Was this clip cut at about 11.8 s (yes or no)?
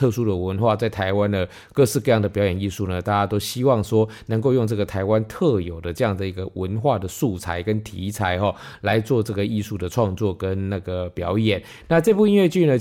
yes